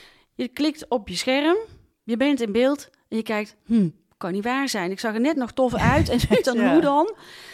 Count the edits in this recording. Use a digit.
1